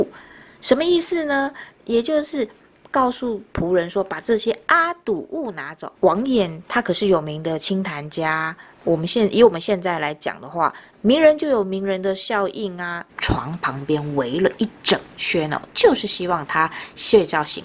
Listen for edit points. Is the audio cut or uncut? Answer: cut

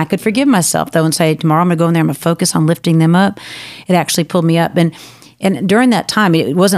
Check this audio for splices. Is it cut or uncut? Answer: uncut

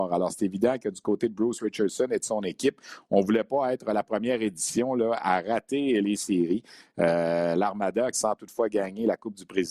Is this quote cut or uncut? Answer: cut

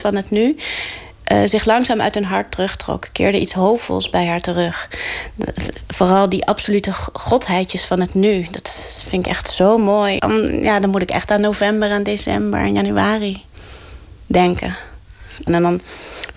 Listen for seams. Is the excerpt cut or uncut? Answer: cut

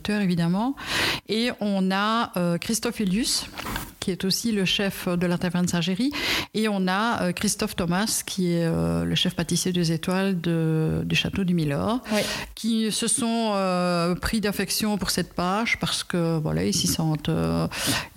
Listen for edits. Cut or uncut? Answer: uncut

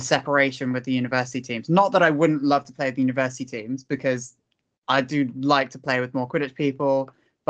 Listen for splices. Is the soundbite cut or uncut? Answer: uncut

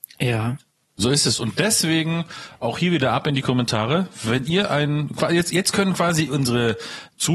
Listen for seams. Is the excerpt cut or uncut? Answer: uncut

